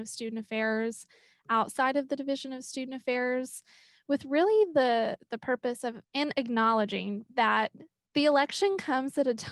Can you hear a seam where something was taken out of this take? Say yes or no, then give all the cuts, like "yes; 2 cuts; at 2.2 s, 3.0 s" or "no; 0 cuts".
yes; 2 cuts; at 6.0 s, 7.3 s